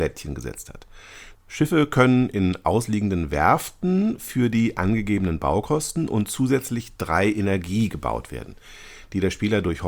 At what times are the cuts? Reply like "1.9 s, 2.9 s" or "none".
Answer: 1.3 s

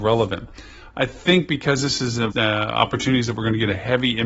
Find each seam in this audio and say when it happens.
2.3 s

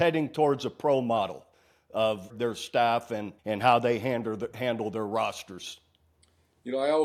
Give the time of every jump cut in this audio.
2.3 s, 3.4 s

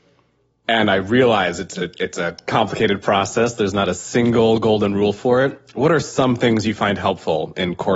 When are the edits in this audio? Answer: none

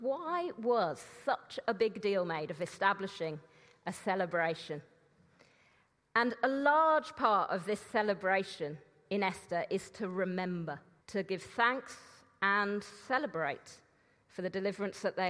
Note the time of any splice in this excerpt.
11.0 s

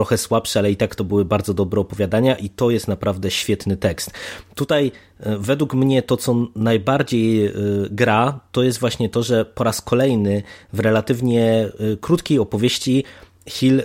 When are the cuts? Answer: none

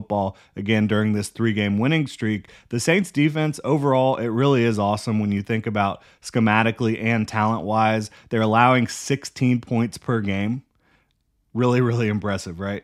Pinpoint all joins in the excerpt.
none

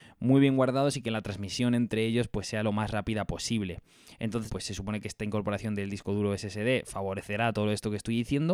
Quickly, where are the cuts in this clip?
4.5 s

